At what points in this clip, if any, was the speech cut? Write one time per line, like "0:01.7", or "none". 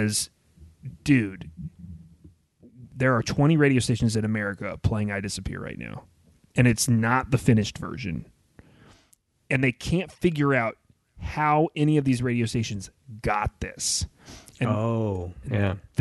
none

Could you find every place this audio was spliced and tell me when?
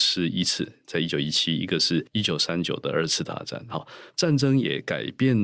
none

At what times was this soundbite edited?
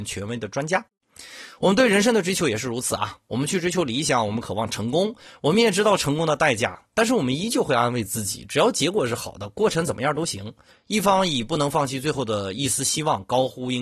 0:10.7

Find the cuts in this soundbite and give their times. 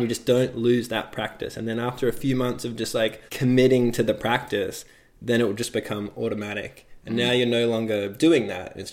0:03.3

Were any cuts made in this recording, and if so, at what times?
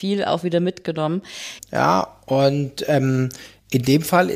0:01.6

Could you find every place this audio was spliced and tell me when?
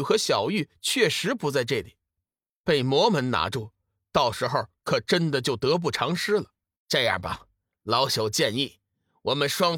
0:06.8

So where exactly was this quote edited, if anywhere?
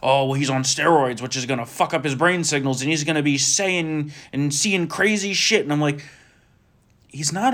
none

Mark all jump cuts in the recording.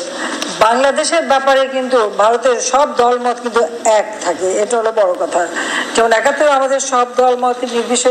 0:04.6

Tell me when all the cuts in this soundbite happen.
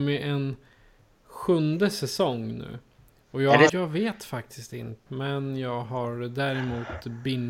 0:03.7
0:05.1

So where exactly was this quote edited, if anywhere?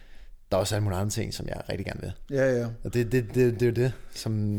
none

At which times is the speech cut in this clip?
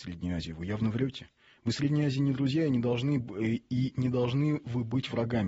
none

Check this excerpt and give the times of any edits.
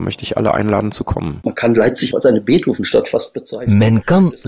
0:01.4

